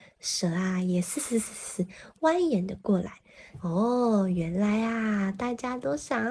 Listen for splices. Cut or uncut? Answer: cut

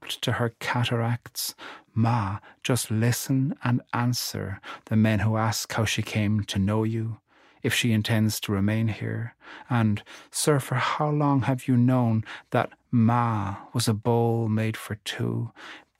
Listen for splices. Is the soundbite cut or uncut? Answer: uncut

